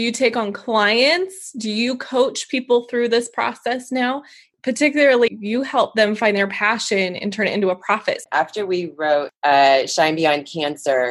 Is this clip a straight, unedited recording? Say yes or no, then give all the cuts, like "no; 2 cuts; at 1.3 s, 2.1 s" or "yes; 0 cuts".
no; 2 cuts; at 5.3 s, 8.2 s